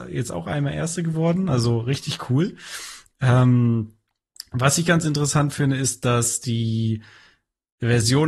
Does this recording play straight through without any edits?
yes; 0 cuts

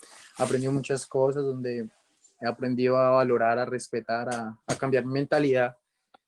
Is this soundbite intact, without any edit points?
no; 1 cut; at 4.6 s

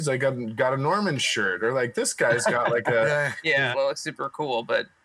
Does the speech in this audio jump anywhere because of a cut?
yes; 1 cut; at 3.7 s

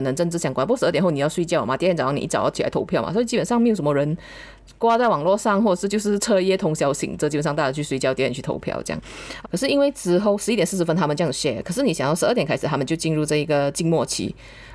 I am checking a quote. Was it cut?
yes; 1 cut; at 9.4 s

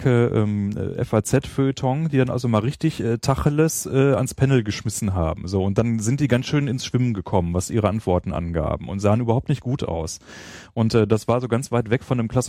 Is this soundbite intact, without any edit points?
yes; 0 cuts

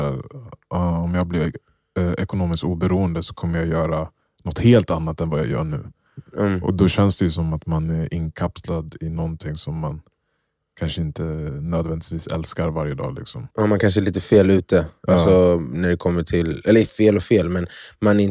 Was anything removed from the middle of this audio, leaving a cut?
yes; 1 cut; at 13.5 s

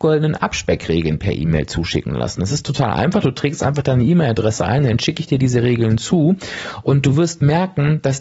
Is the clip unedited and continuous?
yes; 0 cuts

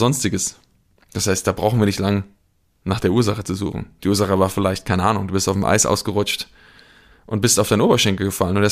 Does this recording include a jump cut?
no; 0 cuts

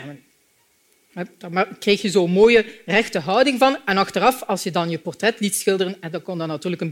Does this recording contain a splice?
no; 0 cuts

